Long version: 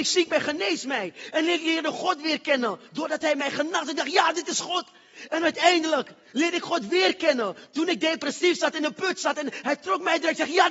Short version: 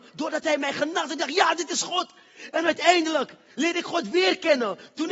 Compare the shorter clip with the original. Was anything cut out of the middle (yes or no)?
no